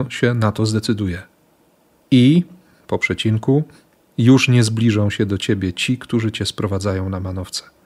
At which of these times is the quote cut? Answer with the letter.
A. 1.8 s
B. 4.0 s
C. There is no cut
C